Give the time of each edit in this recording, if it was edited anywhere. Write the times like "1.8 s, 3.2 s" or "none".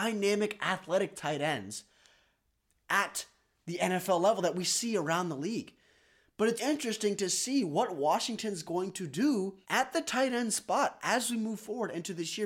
6.6 s, 9.6 s